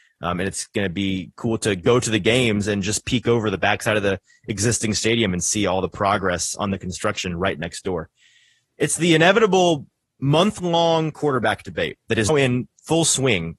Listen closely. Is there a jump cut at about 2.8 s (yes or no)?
no